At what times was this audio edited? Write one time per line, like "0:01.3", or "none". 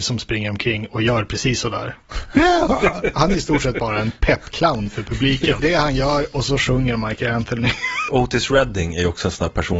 0:05.6
0:08.1